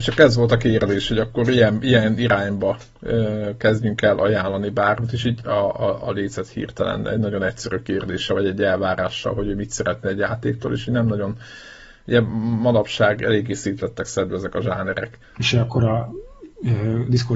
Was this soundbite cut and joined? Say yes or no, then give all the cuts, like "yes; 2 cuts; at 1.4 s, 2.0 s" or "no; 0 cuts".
yes; 2 cuts; at 5.5 s, 15.2 s